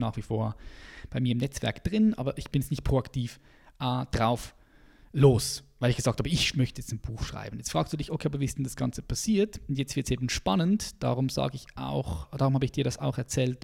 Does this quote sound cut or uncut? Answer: uncut